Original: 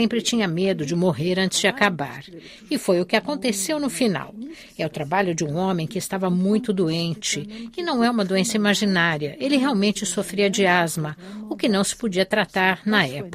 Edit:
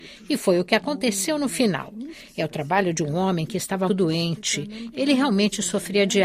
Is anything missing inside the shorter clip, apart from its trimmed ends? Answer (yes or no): yes